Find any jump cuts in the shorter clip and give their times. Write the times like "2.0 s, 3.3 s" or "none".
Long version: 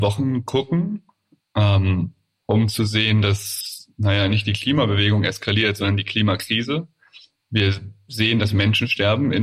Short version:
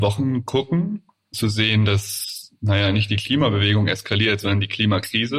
1.3 s